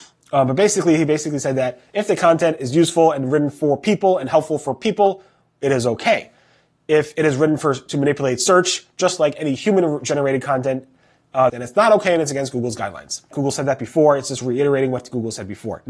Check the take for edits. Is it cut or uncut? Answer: cut